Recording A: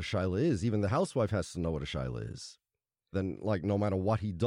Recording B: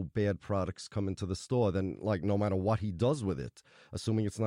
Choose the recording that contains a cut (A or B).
A